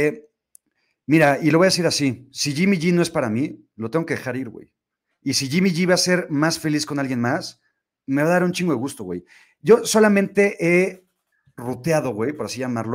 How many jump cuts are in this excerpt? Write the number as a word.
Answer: zero